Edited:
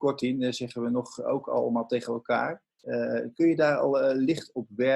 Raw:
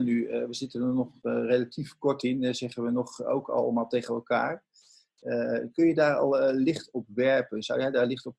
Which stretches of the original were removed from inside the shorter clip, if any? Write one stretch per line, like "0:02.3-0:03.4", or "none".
0:04.7-0:05.1